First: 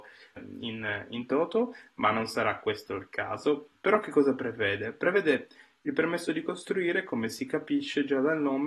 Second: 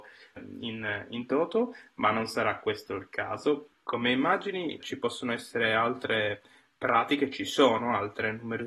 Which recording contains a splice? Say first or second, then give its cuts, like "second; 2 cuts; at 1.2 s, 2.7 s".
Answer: second; 2 cuts; at 3.7 s, 4.8 s